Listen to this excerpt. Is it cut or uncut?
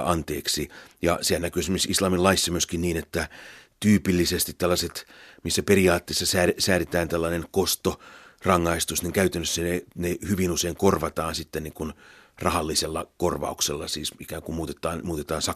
uncut